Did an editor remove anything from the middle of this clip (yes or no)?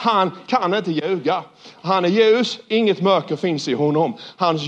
no